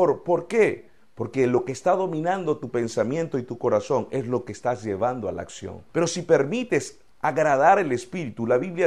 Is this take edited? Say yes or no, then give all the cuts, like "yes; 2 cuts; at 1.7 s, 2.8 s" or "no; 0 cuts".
yes; 1 cut; at 5.9 s